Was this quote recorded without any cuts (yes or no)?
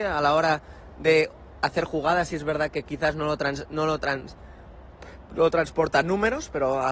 yes